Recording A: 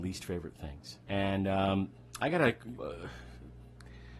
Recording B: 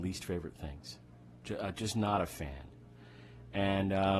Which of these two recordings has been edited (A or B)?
A